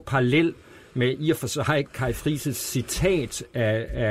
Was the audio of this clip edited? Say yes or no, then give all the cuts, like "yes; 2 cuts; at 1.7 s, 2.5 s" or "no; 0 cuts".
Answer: no; 0 cuts